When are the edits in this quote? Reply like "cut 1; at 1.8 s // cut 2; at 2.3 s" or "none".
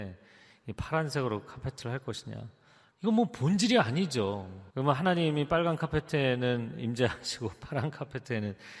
cut 1; at 2.9 s // cut 2; at 4.7 s

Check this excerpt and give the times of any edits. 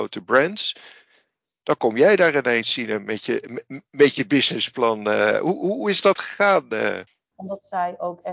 cut 1; at 7.3 s

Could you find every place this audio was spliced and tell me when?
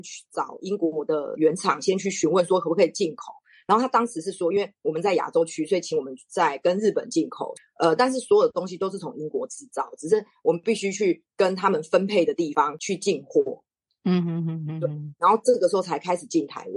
none

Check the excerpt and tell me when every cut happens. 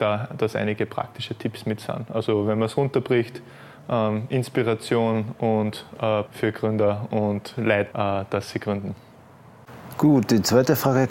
cut 1; at 6.3 s // cut 2; at 7.9 s

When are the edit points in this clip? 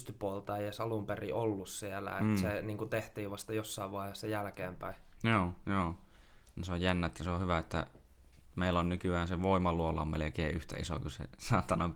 none

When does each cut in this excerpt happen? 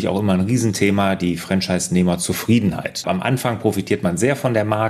cut 1; at 3.0 s

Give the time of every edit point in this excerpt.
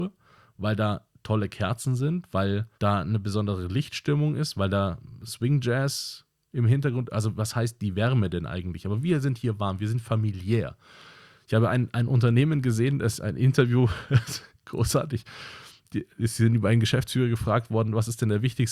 cut 1; at 2.7 s

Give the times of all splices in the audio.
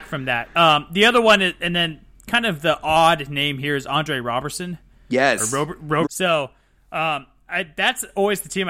cut 1; at 6.0 s

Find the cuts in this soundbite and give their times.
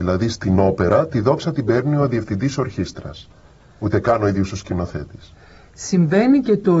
none

